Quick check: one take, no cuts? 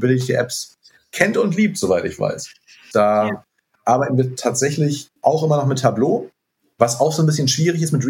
no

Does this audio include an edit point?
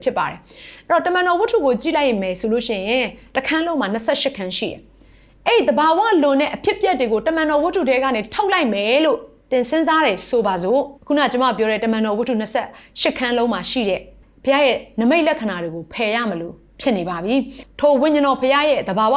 yes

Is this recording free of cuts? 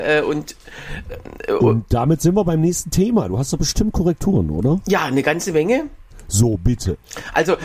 yes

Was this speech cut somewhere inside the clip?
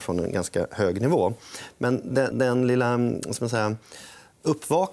yes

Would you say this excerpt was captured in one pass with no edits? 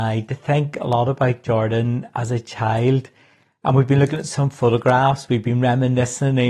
yes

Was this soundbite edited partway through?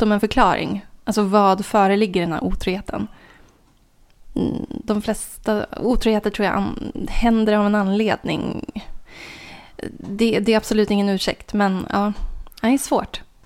no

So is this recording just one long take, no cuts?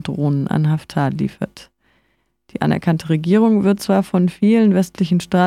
yes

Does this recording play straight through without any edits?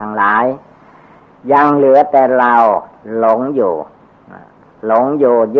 yes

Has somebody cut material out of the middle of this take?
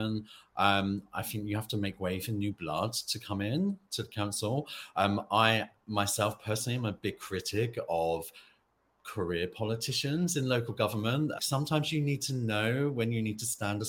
yes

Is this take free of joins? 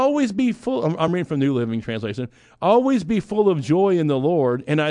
yes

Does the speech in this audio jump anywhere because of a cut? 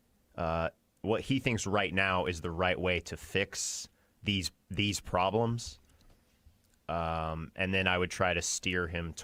no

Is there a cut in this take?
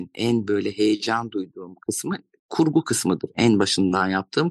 no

